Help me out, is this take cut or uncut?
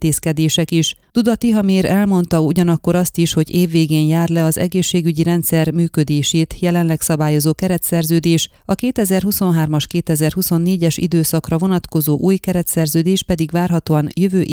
cut